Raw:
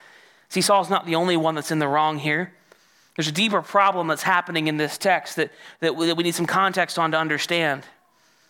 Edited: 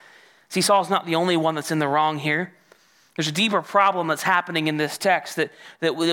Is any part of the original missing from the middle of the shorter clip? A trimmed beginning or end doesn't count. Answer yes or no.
no